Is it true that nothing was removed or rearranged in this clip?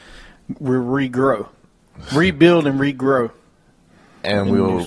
yes; 0 cuts

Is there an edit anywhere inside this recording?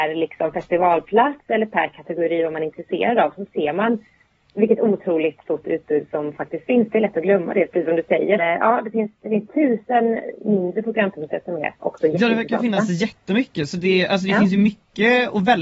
yes; 1 cut; at 8.4 s

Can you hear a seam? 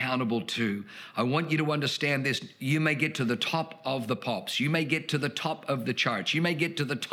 no; 0 cuts

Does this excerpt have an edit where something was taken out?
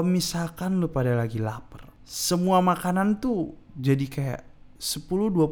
no; 0 cuts

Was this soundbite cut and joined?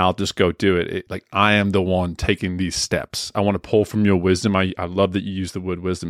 yes; 2 cuts; at 1.1 s, 3.3 s

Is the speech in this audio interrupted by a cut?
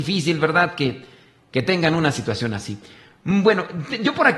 no; 0 cuts

